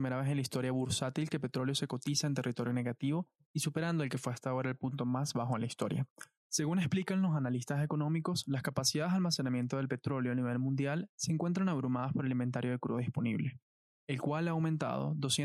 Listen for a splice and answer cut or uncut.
cut